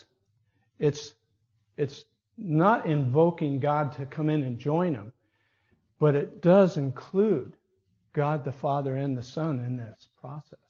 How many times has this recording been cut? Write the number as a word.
zero